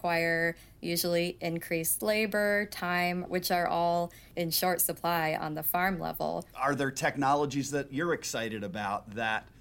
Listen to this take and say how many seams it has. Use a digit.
2